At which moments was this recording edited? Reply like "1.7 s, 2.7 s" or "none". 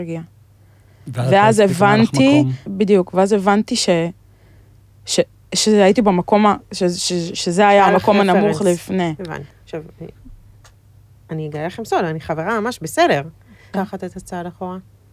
2.7 s, 9.5 s, 13.7 s